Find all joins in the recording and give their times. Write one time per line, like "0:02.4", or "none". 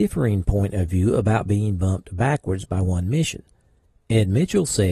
none

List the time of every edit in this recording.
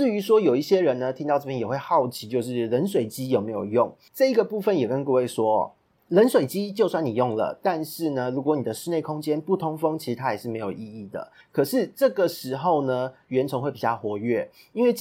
0:11.4

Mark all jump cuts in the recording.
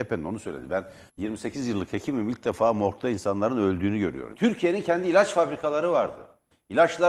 0:01.1
0:04.3

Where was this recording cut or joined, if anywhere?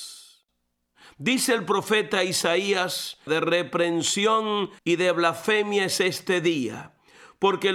0:03.3
0:04.8

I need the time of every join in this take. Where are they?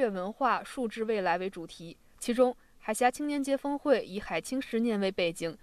0:02.1

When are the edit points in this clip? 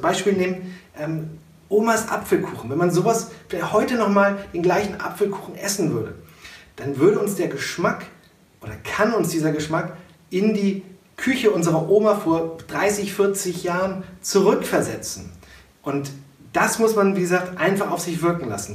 0:15.7

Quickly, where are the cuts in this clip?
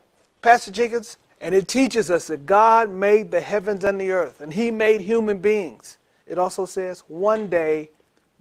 0:01.3
0:06.2

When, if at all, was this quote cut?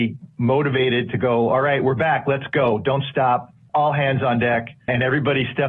none

